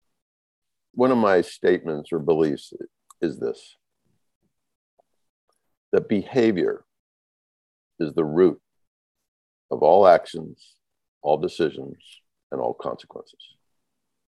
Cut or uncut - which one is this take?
cut